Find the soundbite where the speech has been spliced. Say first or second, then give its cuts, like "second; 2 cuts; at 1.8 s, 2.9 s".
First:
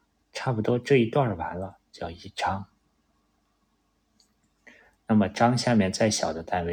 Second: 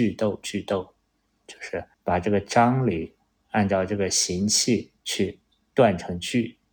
second; 2 cuts; at 1.9 s, 5.0 s